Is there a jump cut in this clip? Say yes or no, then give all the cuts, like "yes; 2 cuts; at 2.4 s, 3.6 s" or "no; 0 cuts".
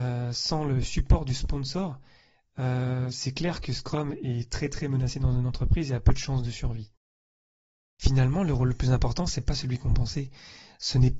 no; 0 cuts